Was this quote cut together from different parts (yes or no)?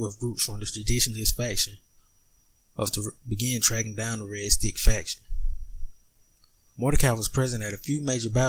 yes